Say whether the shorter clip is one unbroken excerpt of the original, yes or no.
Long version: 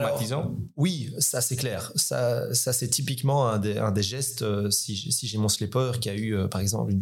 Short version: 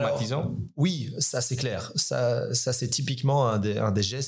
yes